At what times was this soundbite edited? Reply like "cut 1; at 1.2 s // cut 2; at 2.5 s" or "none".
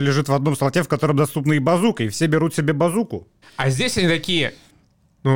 cut 1; at 3.4 s